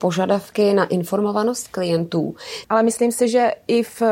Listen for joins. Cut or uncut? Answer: cut